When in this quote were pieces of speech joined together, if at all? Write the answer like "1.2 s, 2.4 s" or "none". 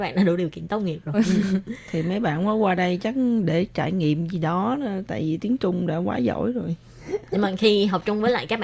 1.1 s